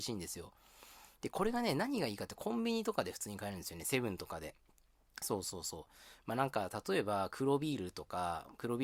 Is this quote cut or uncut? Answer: uncut